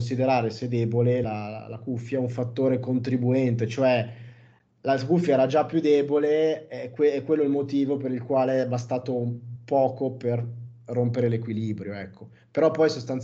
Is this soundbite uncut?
yes; 0 cuts

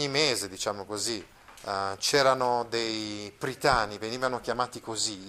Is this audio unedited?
yes; 0 cuts

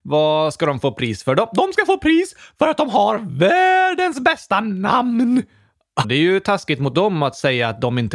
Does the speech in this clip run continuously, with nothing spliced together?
no; 1 cut; at 6.0 s

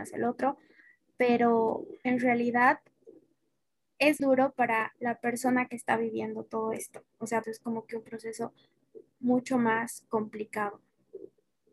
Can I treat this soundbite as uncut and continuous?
no; 2 cuts; at 4.2 s, 7.4 s

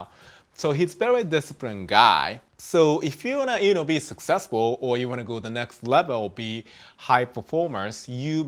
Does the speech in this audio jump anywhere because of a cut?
yes; 1 cut; at 2.5 s

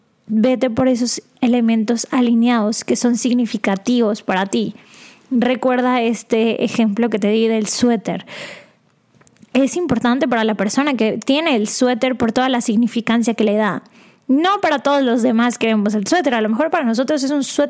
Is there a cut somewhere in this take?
no; 0 cuts

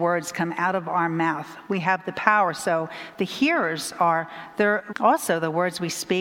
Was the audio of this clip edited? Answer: yes; 1 cut; at 4.9 s

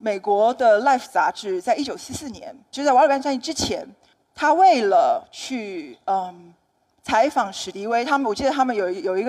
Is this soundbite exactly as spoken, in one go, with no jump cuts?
yes; 0 cuts

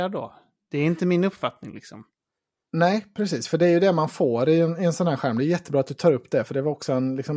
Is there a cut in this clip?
no; 0 cuts

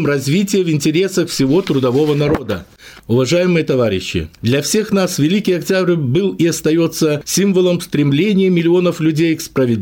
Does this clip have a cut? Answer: yes; 2 cuts; at 3.0 s, 4.4 s

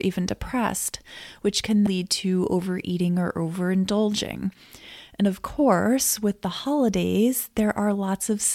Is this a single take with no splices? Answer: no; 1 cut; at 1.9 s

